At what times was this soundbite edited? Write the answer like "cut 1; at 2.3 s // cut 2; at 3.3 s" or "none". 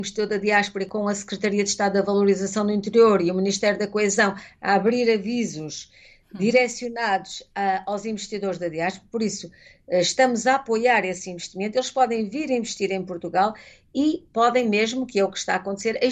none